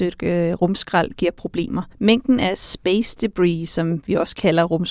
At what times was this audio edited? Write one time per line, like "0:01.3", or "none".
0:01.9